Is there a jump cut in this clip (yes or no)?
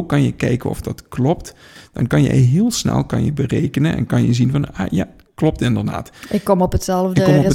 no